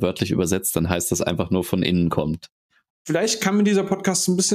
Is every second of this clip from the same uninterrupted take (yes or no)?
no